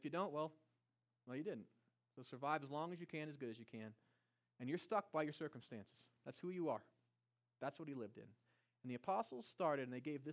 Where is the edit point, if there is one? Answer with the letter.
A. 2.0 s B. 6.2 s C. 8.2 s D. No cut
D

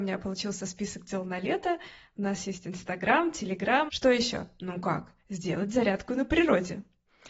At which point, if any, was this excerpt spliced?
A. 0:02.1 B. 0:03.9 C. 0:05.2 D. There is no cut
B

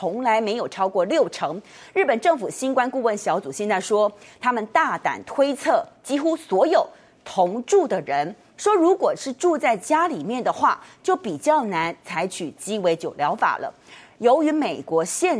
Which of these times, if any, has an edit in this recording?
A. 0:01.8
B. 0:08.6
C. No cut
B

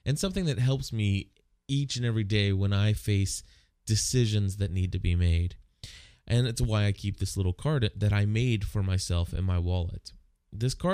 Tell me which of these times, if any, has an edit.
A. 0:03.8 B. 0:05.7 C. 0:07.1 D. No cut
D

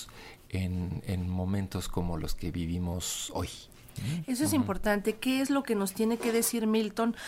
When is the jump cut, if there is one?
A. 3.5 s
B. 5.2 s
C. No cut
C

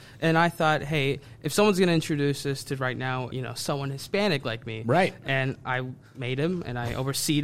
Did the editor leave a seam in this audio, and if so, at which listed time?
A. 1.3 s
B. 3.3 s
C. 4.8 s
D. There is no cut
B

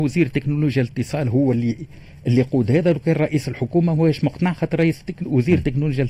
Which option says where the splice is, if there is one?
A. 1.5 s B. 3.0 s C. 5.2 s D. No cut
D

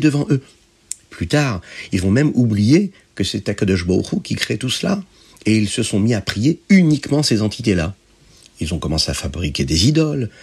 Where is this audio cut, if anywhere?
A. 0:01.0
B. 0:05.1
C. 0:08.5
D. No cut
D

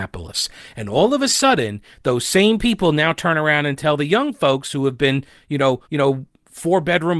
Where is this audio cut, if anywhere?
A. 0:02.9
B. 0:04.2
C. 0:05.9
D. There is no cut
C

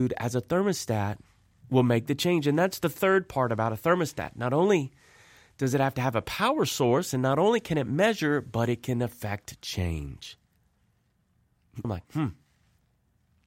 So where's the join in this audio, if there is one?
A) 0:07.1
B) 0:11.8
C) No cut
B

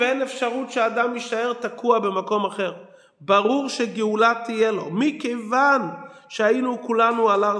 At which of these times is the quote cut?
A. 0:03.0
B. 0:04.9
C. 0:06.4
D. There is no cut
D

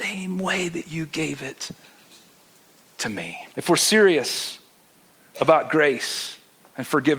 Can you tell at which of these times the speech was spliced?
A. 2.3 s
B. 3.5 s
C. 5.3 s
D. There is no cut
B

